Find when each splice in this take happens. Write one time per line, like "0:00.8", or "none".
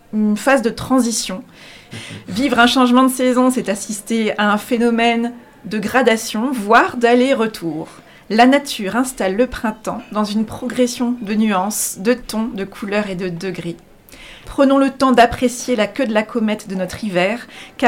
0:01.9
0:14.4